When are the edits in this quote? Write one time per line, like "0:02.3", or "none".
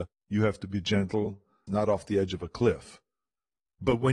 0:01.7